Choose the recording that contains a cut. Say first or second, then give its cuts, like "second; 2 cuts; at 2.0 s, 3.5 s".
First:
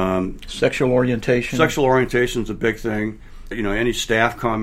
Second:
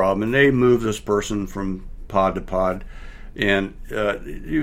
first; 1 cut; at 3.5 s